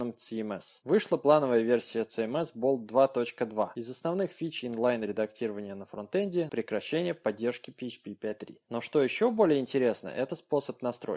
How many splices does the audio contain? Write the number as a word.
two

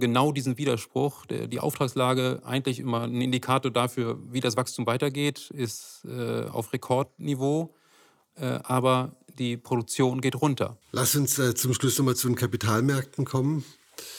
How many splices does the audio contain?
one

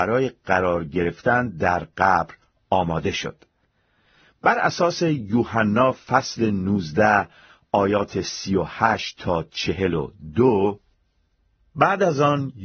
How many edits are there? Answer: zero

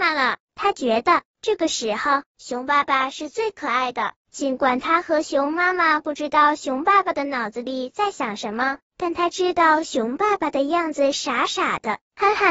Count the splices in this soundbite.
zero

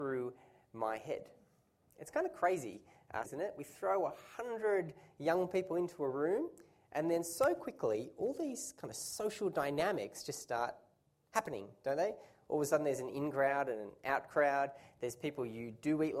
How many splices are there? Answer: one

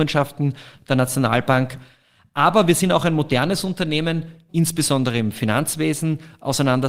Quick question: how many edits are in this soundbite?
one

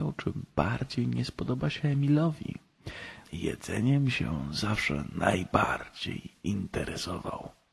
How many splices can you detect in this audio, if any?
one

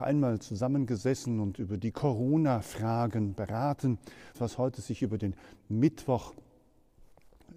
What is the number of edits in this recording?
one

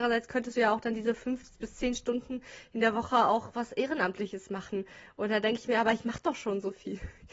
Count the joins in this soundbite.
zero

